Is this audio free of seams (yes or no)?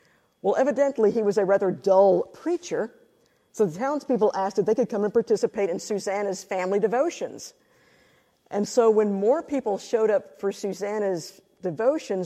yes